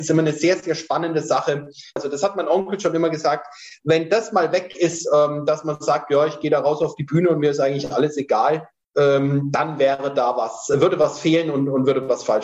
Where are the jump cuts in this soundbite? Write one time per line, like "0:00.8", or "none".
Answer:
0:02.0